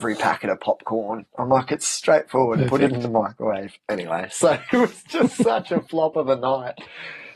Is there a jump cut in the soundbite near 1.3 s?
no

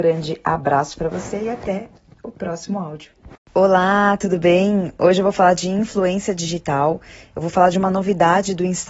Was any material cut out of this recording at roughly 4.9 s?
no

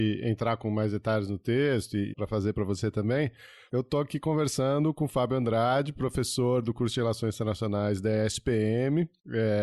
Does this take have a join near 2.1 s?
yes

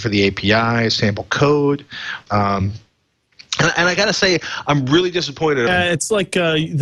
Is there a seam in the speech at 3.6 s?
no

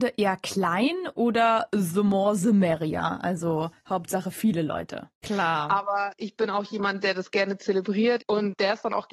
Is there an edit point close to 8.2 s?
yes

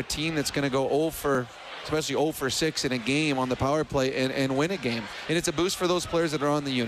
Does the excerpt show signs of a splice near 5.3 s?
yes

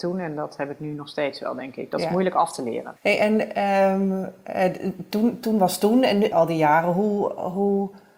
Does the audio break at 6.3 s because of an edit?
yes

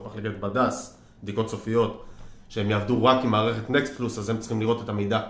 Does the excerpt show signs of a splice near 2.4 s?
no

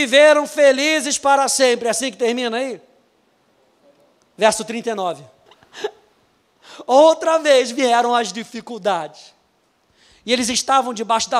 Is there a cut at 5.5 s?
yes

